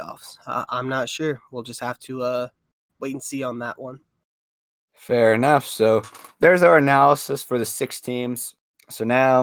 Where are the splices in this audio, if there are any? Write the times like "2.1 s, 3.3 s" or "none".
none